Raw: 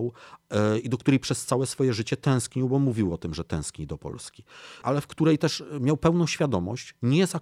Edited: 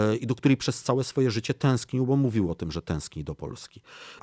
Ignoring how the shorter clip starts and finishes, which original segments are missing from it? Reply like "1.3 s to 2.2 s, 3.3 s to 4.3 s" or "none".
none